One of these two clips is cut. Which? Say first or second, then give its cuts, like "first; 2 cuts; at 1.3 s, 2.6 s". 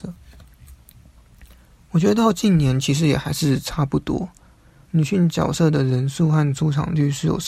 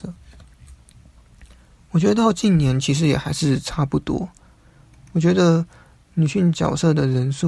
first; 1 cut; at 4.9 s